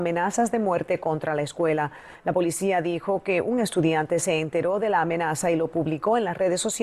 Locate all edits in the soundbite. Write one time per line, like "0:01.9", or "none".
none